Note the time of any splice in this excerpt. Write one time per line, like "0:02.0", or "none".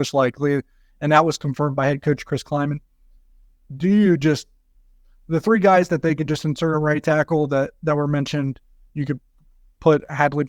0:08.9